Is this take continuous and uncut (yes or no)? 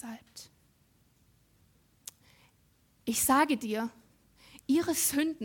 yes